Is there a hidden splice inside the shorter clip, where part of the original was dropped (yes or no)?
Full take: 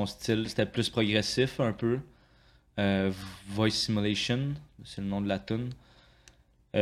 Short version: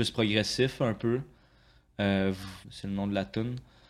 yes